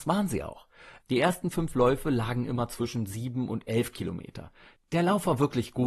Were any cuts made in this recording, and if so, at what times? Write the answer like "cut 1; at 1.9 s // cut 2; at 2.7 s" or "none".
cut 1; at 1.0 s // cut 2; at 4.8 s